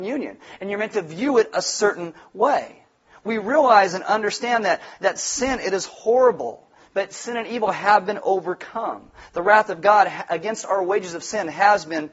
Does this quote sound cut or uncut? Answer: uncut